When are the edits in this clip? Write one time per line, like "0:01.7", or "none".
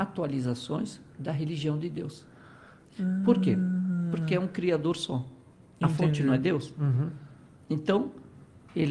none